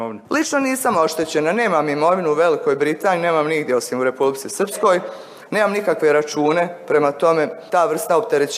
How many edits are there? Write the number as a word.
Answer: zero